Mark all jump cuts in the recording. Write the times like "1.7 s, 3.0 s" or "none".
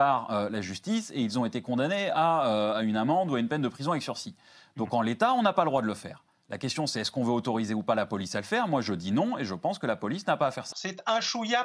10.7 s